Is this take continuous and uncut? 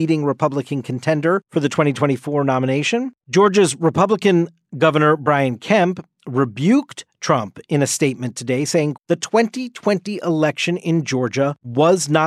no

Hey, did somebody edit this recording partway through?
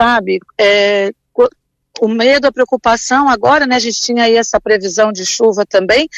no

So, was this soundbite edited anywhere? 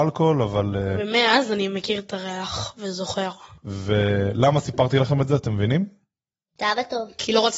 no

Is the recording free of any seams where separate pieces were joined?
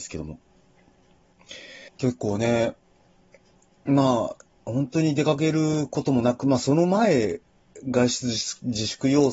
no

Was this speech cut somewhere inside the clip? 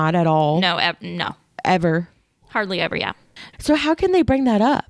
yes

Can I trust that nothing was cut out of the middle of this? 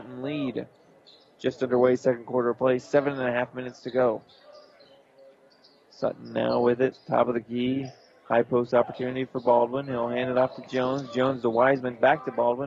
yes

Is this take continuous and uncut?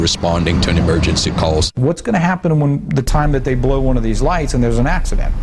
yes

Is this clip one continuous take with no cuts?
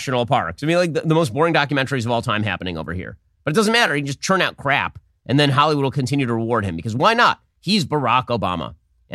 yes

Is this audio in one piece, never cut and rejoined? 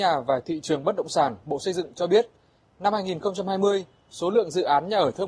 yes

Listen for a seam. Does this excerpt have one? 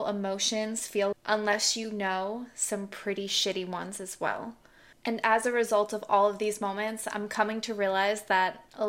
yes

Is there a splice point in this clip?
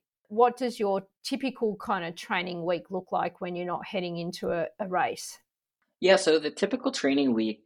no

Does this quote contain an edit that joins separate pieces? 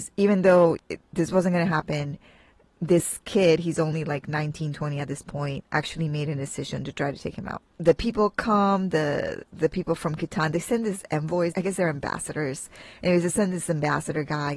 yes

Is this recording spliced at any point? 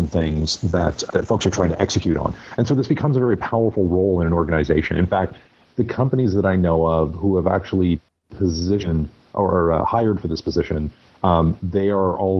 no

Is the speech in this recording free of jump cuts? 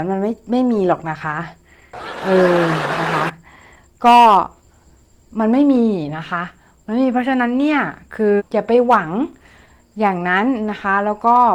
no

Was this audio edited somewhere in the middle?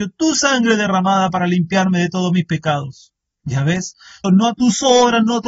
yes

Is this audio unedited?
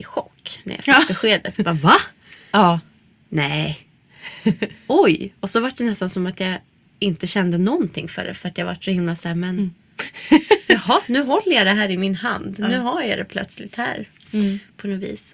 yes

